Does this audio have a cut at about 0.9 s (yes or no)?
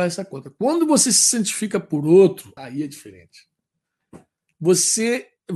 no